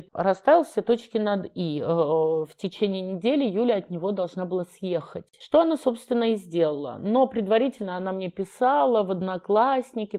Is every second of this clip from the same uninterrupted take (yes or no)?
no